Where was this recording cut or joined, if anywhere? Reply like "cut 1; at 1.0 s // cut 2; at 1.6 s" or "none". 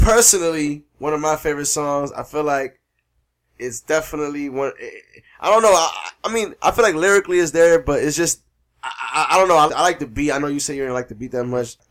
cut 1; at 9.7 s

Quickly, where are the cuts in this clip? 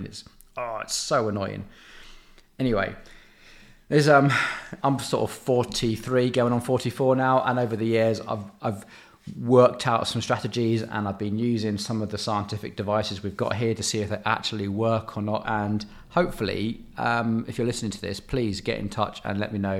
cut 1; at 15.4 s

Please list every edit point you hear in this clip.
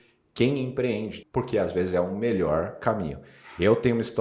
cut 1; at 1.2 s

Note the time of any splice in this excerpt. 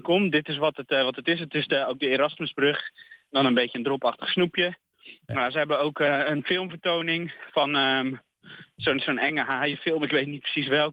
none

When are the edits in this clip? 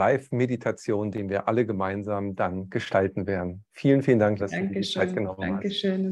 cut 1; at 4.4 s

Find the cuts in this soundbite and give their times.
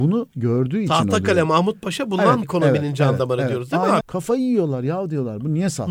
cut 1; at 2.4 s // cut 2; at 4.0 s

